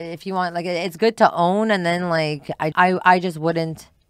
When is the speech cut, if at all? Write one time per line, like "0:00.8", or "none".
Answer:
0:02.7